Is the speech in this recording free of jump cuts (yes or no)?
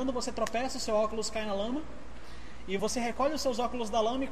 no